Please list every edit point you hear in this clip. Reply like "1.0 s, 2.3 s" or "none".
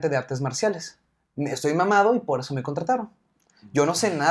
none